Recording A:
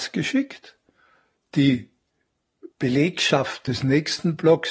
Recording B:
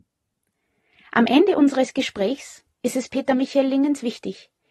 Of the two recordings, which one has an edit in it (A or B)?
A